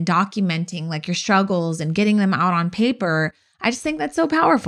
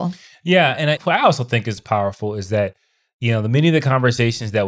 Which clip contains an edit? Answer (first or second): second